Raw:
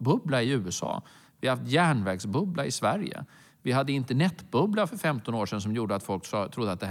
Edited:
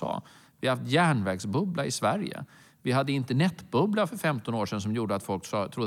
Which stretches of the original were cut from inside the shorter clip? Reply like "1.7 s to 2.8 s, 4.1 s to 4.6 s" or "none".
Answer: none